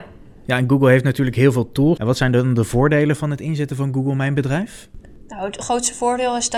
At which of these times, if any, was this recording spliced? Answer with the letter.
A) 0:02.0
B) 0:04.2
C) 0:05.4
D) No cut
A